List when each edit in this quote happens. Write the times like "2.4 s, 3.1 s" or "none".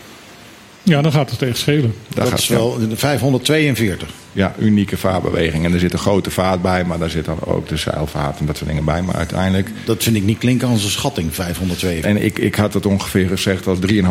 12.0 s

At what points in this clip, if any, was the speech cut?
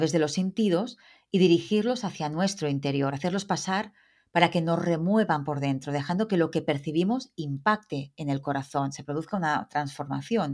none

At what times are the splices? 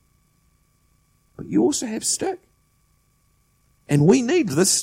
none

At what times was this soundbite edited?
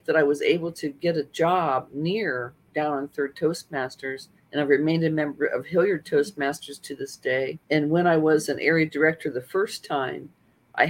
4.4 s, 7.6 s

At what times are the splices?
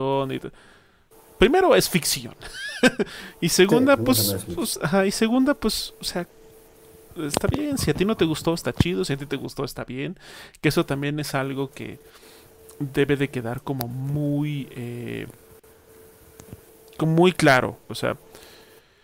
17.9 s

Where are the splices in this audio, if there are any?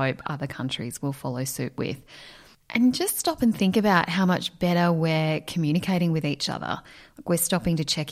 none

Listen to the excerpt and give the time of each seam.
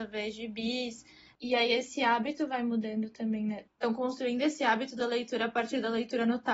1.4 s, 3.7 s

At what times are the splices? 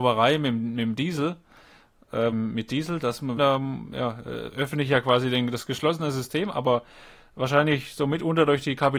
2.3 s, 3.4 s

